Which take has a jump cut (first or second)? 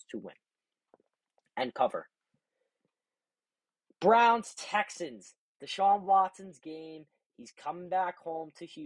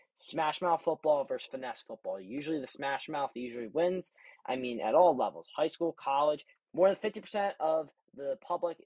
second